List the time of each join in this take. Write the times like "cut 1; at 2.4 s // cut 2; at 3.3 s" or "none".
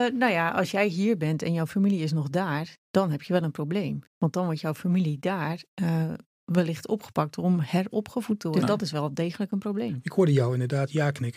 cut 1; at 4.1 s